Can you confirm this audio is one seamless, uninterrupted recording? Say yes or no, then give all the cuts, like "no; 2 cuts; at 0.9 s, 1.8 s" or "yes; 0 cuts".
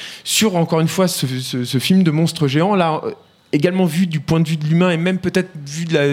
yes; 0 cuts